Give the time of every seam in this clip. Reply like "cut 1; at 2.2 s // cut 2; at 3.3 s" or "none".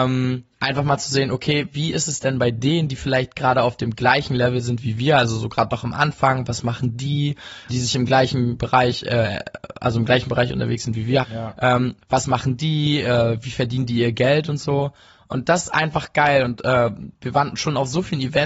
cut 1; at 7.7 s // cut 2; at 11.2 s

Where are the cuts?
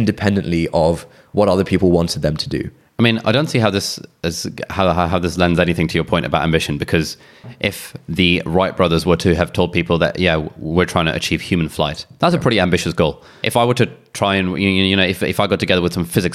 none

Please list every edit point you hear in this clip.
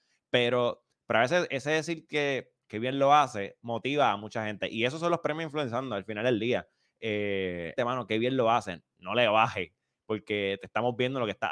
cut 1; at 1.5 s // cut 2; at 7.8 s

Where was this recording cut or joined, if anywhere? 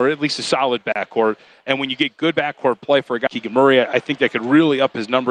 cut 1; at 3.3 s

